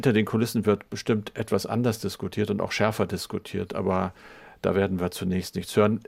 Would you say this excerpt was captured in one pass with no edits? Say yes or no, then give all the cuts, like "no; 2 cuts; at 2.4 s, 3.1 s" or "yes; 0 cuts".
yes; 0 cuts